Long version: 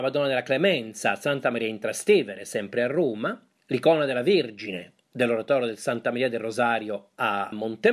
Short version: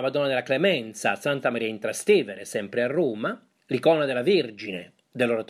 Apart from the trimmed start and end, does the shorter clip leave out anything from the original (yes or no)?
no